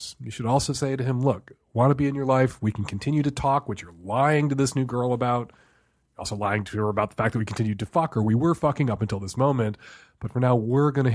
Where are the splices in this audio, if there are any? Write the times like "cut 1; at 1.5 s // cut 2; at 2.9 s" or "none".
none